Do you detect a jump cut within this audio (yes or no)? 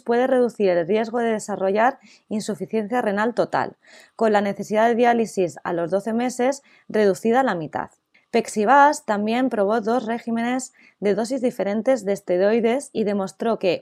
yes